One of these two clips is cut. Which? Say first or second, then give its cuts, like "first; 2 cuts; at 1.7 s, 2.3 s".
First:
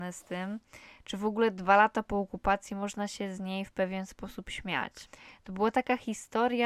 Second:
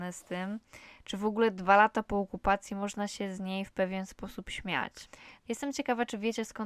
second; 1 cut; at 5.4 s